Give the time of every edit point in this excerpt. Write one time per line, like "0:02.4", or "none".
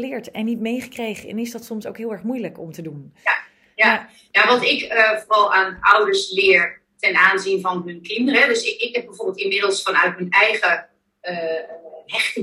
none